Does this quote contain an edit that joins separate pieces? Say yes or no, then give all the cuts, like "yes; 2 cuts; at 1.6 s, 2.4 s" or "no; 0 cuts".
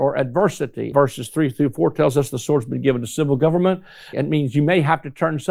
yes; 2 cuts; at 0.9 s, 4.1 s